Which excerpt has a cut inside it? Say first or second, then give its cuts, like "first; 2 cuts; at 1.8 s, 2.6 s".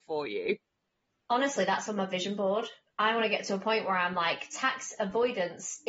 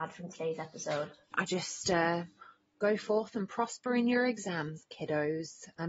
second; 1 cut; at 1.3 s